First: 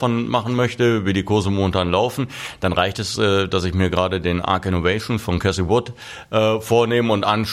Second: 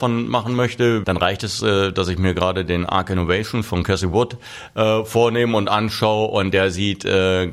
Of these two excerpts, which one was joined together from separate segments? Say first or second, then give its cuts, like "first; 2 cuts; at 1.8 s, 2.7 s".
second; 1 cut; at 1.0 s